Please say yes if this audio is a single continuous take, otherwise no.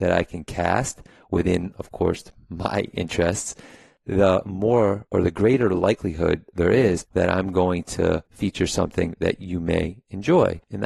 yes